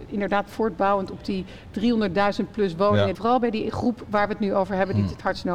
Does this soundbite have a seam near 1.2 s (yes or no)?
no